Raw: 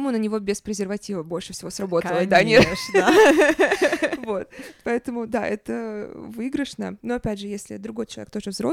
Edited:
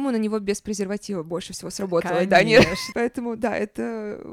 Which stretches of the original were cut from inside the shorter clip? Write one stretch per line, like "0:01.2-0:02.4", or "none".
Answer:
0:02.9-0:04.8